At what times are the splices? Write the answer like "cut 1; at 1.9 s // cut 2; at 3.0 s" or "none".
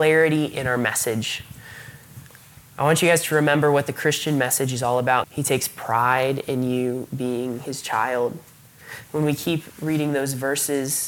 cut 1; at 5.2 s